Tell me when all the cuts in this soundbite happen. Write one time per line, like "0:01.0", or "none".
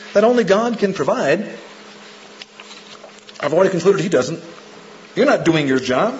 0:05.1